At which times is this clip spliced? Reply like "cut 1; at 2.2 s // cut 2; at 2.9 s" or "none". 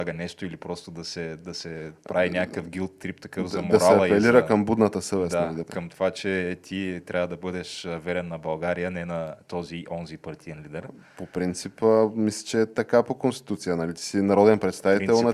cut 1; at 5.6 s